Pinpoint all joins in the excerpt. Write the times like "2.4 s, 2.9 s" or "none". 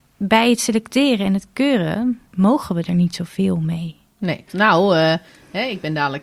2.3 s, 4.5 s